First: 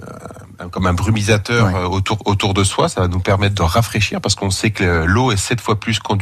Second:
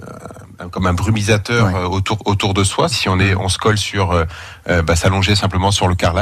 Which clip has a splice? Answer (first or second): second